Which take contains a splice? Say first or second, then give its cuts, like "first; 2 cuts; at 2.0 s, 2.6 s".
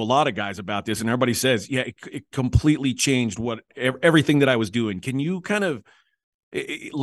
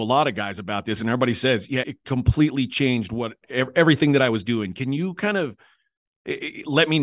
second; 1 cut; at 1.8 s